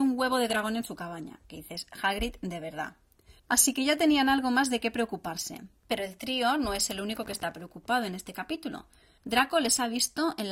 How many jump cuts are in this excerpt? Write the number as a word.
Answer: three